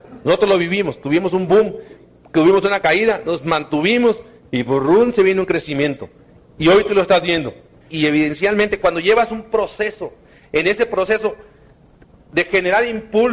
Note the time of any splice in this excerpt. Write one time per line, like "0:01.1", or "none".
0:07.8